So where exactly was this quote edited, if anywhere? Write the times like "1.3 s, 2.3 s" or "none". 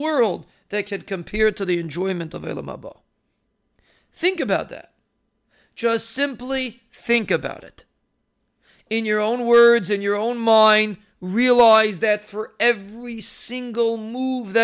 none